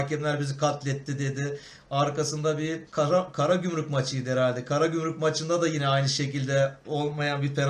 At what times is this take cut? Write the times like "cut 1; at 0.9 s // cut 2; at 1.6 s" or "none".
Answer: cut 1; at 2.9 s